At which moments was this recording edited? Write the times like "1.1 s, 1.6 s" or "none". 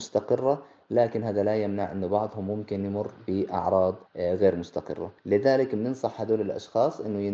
4.1 s, 5.2 s

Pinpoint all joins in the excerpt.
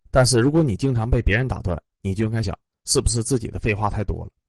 2.4 s

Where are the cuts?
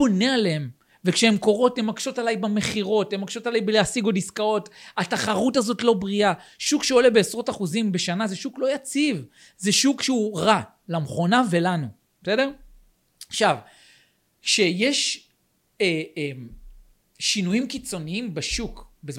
none

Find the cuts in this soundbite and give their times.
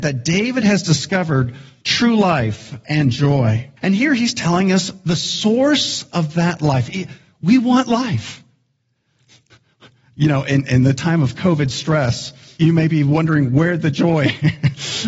3.8 s, 12.6 s

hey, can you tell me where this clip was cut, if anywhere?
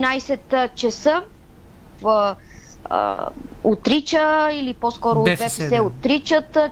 2.0 s

